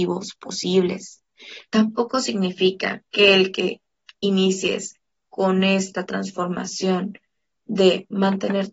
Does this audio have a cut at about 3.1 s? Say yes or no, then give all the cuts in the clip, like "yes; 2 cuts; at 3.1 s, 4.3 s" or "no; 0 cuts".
yes; 2 cuts; at 1.7 s, 3.1 s